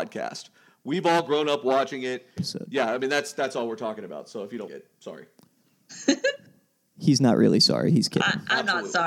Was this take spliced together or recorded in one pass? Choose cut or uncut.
cut